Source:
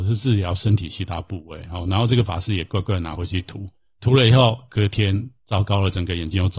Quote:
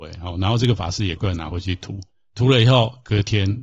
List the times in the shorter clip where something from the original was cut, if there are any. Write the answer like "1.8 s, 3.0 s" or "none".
1.2 s